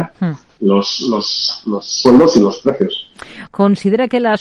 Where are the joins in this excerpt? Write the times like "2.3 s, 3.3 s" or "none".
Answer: 3.5 s